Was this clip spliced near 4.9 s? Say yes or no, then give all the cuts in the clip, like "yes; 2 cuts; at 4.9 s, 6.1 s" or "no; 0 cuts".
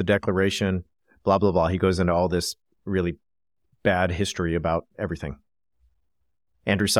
yes; 1 cut; at 4.9 s